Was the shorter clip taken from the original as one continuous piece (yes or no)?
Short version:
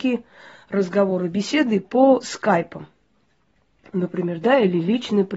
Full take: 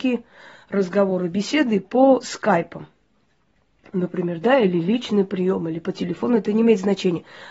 yes